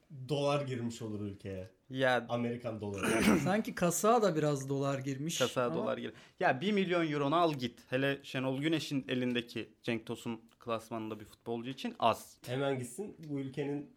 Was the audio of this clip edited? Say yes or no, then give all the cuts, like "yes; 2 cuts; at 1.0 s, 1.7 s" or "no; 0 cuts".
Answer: yes; 2 cuts; at 7.9 s, 12.4 s